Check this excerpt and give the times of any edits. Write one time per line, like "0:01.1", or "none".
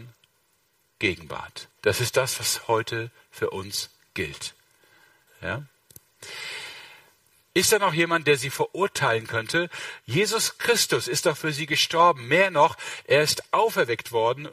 0:01.7
0:05.3
0:07.5